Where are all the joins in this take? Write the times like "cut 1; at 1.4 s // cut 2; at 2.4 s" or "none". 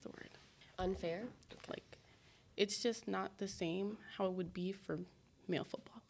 cut 1; at 1.5 s